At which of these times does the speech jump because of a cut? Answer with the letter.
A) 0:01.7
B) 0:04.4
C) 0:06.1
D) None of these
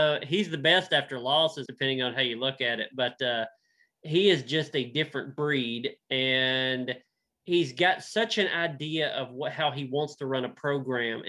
A